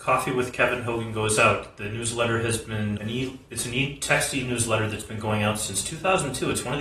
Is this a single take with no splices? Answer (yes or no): no